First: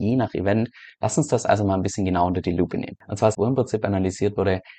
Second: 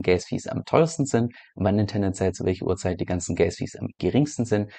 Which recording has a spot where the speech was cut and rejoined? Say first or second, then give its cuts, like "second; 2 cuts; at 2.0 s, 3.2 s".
first; 1 cut; at 3.3 s